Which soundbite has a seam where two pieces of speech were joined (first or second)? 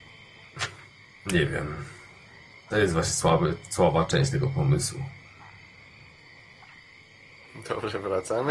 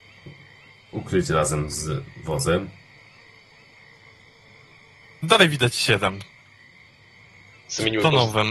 second